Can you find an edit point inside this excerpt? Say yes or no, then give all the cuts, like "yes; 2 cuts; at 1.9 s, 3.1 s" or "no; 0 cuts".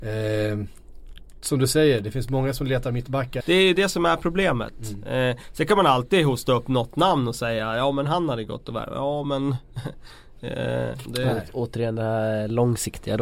yes; 2 cuts; at 3.4 s, 11.0 s